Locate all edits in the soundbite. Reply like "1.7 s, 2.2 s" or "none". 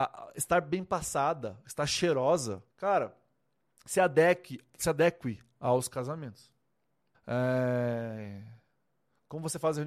2.7 s, 7.1 s